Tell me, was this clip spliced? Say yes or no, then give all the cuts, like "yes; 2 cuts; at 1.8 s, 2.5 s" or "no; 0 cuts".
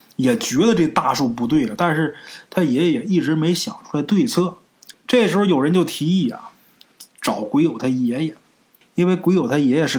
yes; 2 cuts; at 4.9 s, 8.8 s